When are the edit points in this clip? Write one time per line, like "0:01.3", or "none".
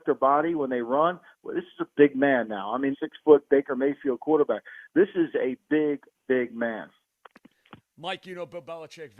0:02.9